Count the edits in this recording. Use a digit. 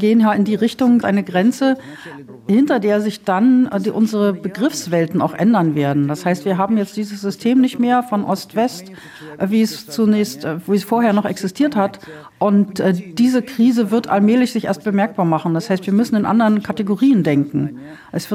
1